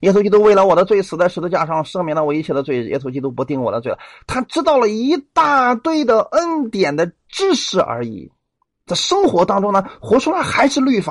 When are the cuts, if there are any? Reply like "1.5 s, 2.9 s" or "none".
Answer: none